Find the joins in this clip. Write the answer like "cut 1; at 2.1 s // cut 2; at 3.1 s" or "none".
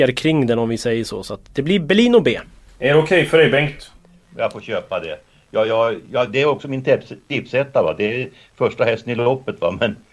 none

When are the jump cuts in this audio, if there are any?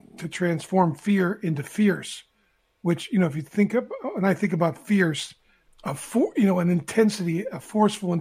cut 1; at 5.7 s

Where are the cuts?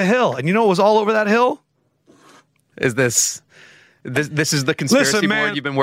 cut 1; at 2.7 s

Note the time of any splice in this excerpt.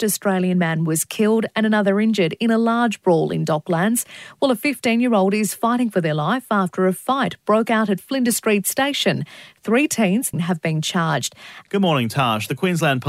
cut 1; at 10.3 s // cut 2; at 11.6 s

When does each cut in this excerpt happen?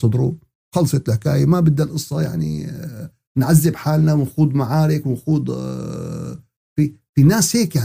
none

